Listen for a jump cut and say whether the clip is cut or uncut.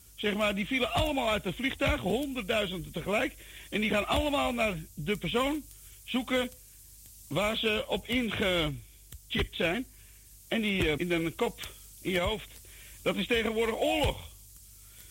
cut